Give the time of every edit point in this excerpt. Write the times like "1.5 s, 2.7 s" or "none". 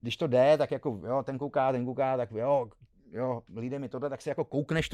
none